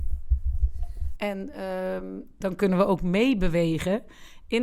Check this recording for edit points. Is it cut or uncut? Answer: cut